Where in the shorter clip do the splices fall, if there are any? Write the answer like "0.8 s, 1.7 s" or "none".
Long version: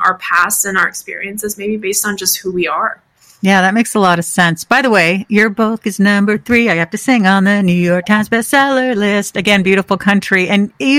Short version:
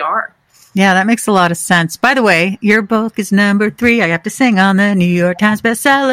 none